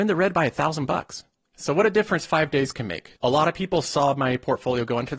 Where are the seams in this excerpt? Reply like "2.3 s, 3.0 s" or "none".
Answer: 1.5 s, 3.2 s

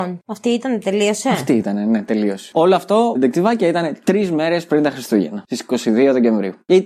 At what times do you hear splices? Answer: 3.2 s

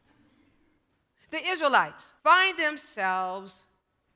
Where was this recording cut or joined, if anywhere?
2.2 s

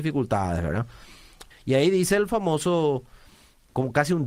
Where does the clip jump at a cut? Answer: 1.5 s

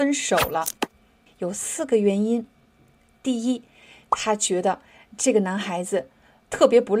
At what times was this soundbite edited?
1.3 s

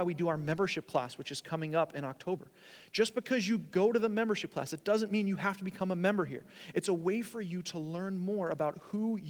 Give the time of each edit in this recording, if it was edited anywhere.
none

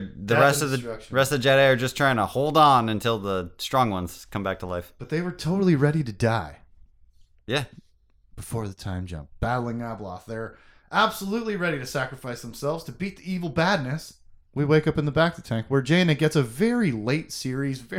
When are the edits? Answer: 14.5 s

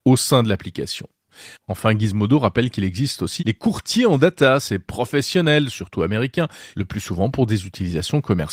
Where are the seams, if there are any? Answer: 3.4 s, 6.7 s

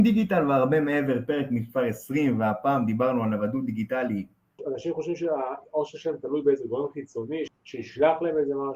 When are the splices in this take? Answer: 4.6 s, 7.5 s

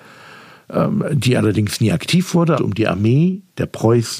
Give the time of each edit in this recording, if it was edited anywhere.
2.6 s

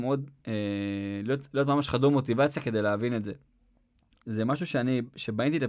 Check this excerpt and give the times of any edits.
4.2 s

